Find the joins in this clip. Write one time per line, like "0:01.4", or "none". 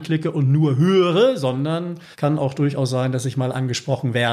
0:02.1